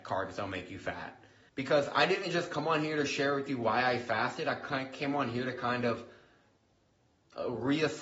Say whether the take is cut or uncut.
cut